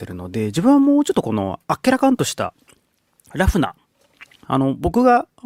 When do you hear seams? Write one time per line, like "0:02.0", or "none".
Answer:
0:04.4